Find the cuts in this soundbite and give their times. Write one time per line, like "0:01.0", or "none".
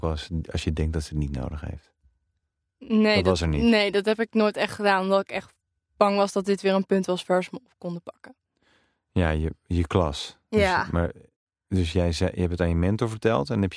none